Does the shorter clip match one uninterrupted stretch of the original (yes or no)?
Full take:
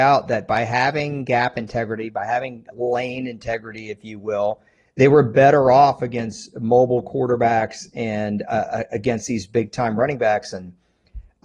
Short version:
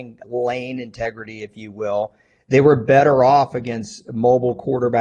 yes